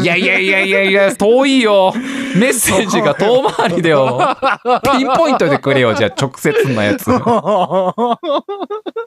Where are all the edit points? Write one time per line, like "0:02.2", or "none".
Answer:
0:01.2

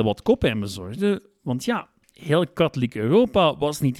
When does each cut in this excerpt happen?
none

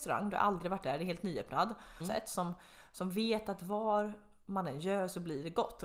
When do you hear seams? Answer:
0:02.0

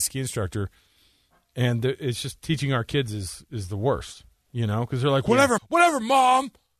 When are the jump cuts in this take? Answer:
0:05.6

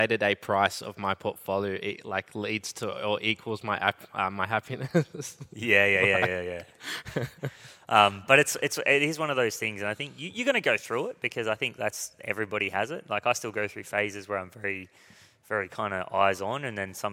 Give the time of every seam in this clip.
none

